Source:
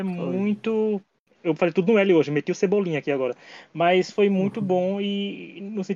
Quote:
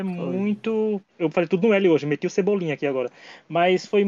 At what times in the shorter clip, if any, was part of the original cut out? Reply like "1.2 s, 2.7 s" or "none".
1.1 s